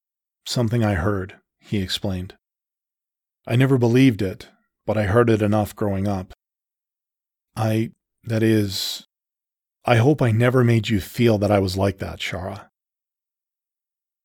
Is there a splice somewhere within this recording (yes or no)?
no